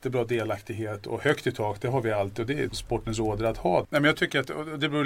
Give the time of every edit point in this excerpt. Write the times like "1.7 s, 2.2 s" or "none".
2.7 s, 3.8 s